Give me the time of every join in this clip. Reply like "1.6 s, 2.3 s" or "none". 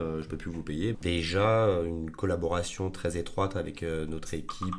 0.9 s

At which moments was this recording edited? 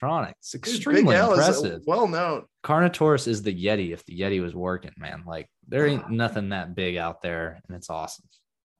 2.6 s

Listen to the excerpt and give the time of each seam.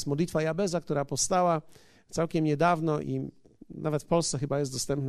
3.0 s

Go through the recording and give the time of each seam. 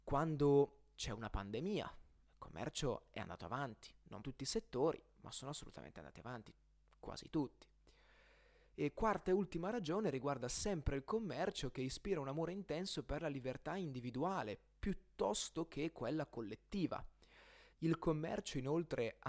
4.2 s, 17.7 s

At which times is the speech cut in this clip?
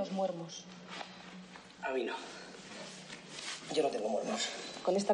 none

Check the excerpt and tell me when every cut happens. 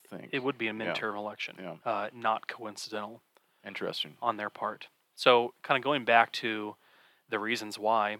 1.8 s

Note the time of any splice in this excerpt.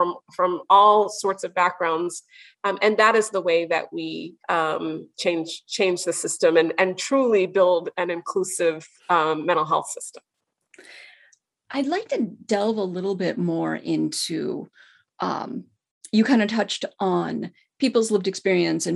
4.4 s

